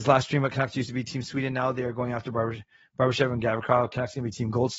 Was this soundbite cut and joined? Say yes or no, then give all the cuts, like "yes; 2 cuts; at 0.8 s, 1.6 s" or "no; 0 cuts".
no; 0 cuts